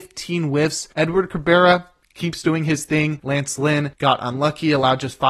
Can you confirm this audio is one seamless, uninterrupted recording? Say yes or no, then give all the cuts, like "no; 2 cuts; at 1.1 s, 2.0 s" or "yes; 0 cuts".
no; 1 cut; at 3.2 s